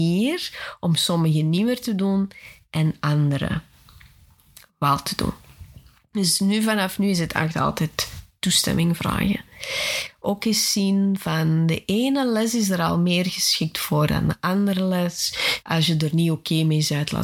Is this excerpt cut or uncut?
cut